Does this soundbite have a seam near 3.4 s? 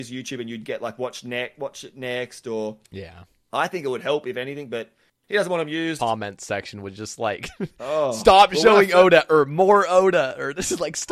no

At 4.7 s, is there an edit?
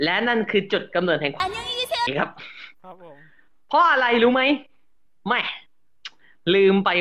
no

